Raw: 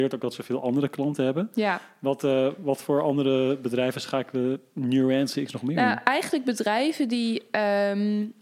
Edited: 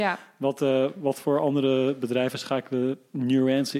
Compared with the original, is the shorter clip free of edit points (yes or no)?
yes